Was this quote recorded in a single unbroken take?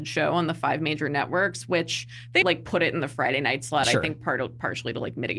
no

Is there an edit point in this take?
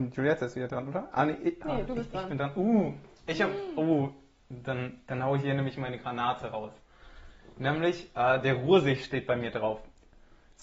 no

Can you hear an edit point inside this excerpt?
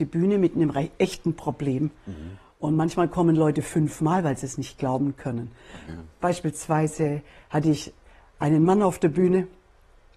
no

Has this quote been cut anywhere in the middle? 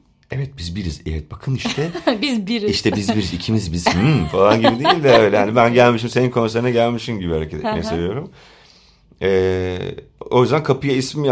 no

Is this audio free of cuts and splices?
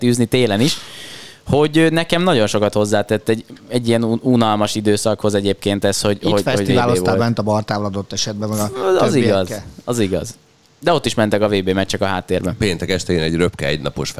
yes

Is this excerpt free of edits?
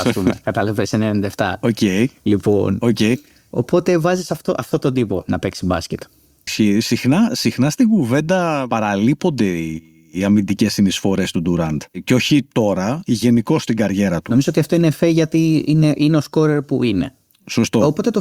no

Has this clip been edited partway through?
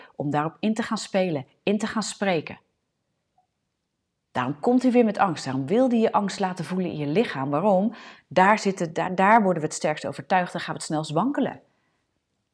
no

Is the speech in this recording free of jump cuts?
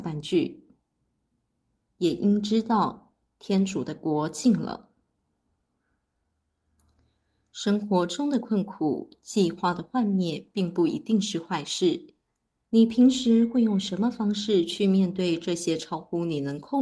no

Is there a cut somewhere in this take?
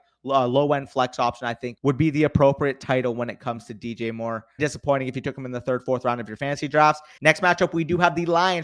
yes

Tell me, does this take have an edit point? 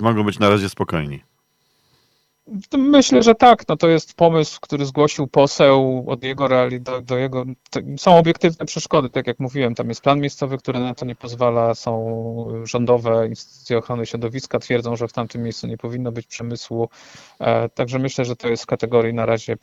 no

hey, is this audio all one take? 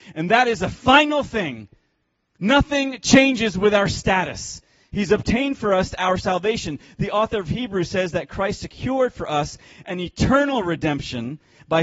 no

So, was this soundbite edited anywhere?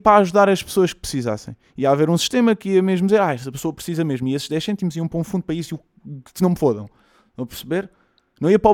no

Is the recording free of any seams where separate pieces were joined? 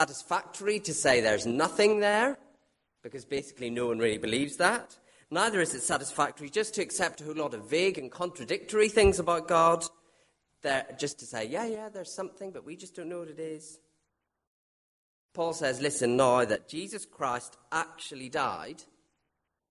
yes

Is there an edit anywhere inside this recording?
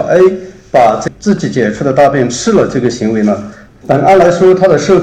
yes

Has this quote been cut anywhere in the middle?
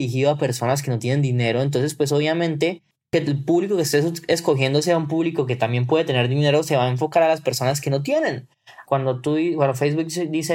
yes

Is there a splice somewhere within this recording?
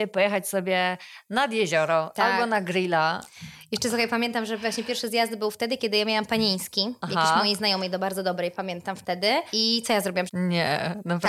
yes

